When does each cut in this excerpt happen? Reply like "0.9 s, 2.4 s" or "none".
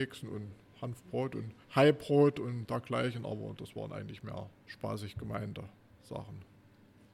1.6 s, 4.6 s